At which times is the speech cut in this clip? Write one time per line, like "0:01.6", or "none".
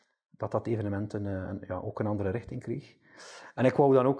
none